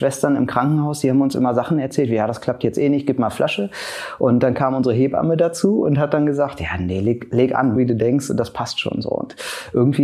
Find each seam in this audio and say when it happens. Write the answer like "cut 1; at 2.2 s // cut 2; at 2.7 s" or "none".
cut 1; at 7.8 s

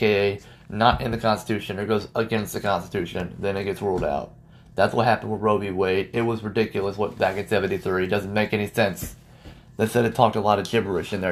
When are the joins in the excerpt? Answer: none

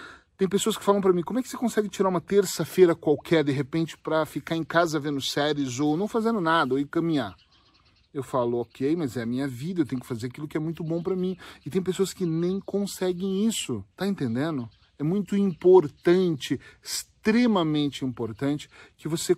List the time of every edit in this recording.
cut 1; at 13.9 s

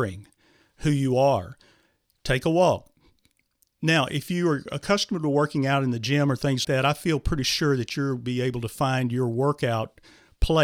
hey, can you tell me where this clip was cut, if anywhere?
cut 1; at 6.6 s

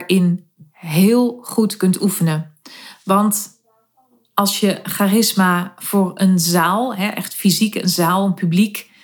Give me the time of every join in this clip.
none

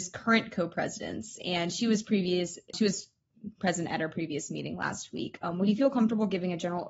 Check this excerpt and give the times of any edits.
cut 1; at 2.7 s

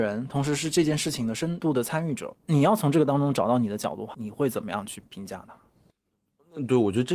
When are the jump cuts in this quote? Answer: cut 1; at 2.4 s // cut 2; at 4.1 s

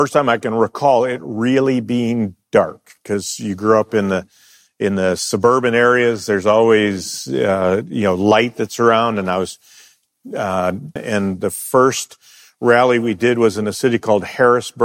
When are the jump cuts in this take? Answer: cut 1; at 11.0 s

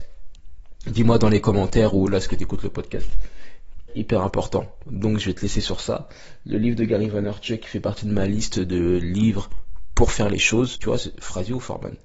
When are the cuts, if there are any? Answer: cut 1; at 3.9 s // cut 2; at 10.7 s

